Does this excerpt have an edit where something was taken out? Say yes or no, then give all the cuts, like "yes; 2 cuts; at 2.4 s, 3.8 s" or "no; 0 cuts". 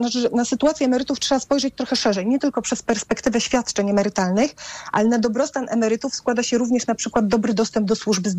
no; 0 cuts